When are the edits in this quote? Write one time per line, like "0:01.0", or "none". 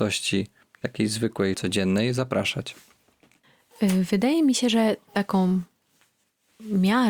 0:01.5